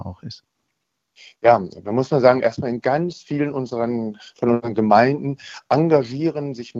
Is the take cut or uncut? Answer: uncut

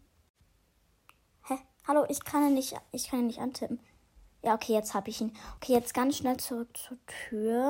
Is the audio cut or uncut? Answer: uncut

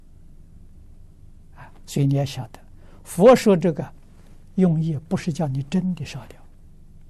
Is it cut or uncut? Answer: cut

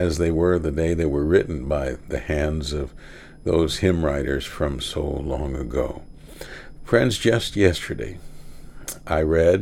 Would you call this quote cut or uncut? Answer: cut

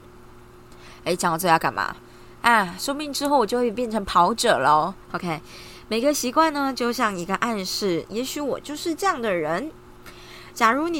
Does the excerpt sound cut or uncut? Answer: cut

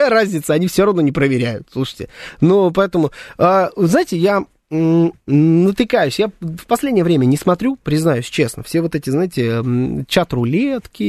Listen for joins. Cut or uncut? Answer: uncut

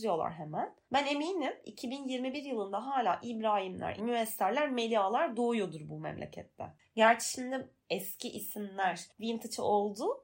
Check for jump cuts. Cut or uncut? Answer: cut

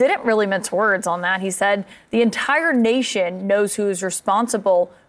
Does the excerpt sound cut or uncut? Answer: uncut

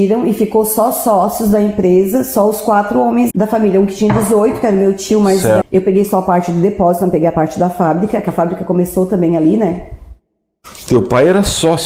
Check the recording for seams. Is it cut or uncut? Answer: cut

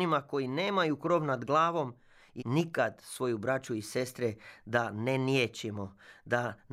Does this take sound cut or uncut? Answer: cut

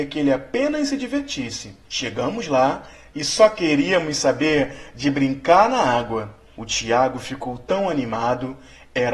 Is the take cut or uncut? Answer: cut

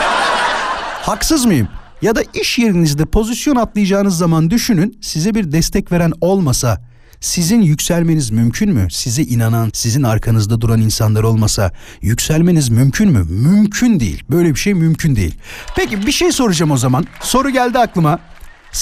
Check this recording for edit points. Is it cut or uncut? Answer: cut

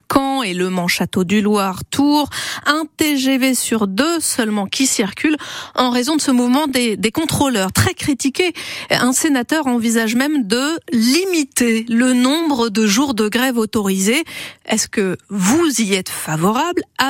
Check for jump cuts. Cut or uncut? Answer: uncut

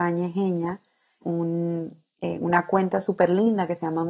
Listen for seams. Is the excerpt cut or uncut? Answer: cut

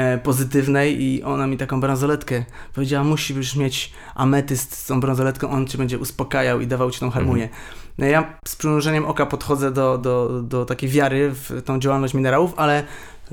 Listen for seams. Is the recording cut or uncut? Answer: uncut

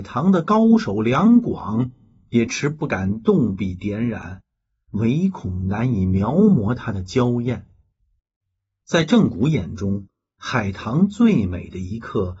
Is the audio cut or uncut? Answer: cut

